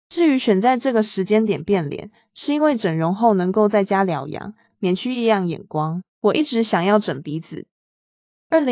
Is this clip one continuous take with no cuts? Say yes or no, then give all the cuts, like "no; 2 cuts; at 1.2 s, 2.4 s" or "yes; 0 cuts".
no; 2 cuts; at 4.7 s, 6.1 s